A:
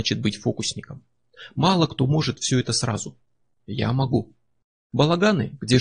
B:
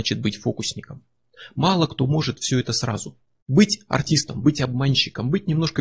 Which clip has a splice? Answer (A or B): B